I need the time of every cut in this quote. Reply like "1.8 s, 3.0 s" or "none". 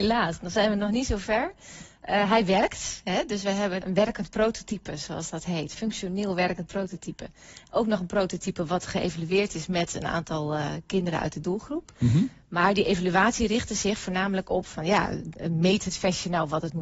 3.8 s

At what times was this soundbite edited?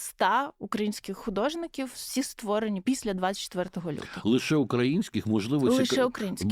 none

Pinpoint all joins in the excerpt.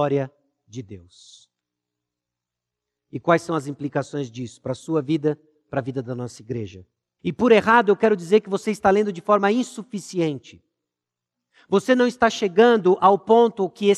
5.6 s, 7.2 s

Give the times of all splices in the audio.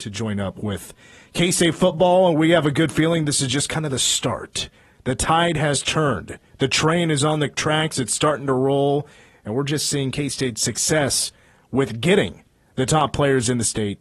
none

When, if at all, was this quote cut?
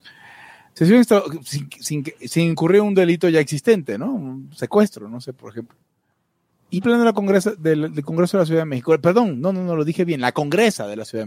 6.8 s

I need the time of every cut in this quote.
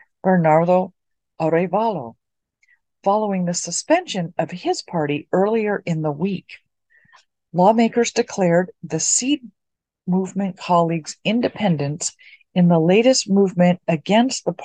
none

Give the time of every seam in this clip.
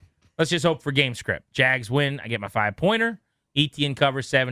none

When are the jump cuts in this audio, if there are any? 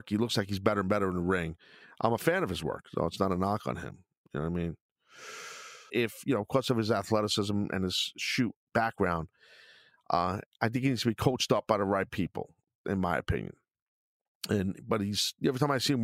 5.9 s

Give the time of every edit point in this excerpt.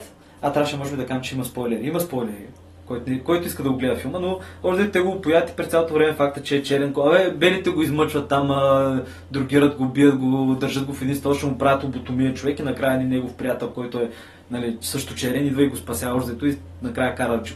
none

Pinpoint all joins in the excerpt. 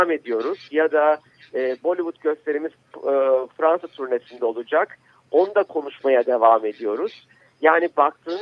none

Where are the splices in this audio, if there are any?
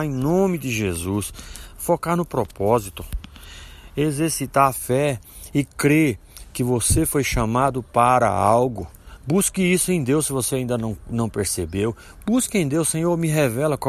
none

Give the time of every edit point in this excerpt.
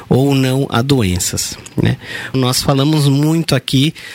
2.3 s

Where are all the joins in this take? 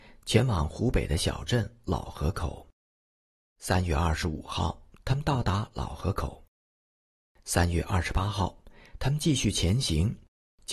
none

